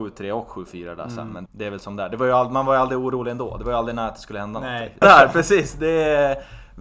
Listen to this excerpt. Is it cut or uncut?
cut